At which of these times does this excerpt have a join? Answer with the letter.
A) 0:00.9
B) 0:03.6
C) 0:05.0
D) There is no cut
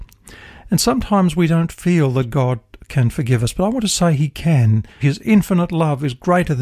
C